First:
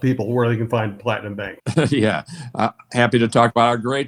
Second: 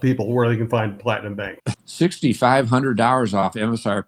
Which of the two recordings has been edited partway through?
second; 1 cut; at 1.7 s

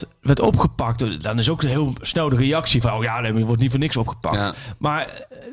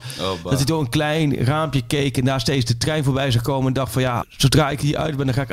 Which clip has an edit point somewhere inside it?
second; 1 cut; at 4.2 s

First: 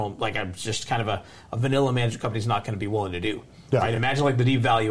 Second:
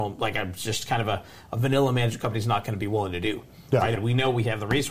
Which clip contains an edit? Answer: second; 1 cut; at 4.0 s

